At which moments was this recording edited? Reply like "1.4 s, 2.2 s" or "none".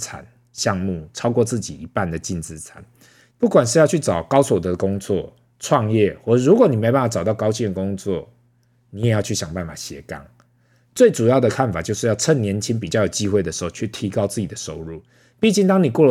3.3 s

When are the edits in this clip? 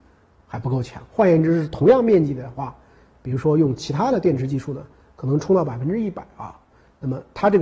none

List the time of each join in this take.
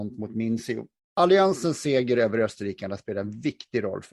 1.0 s

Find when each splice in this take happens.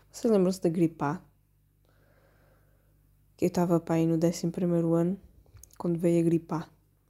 none

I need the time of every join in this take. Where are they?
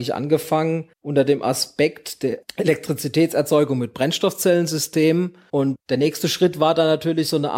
0.9 s, 5.5 s

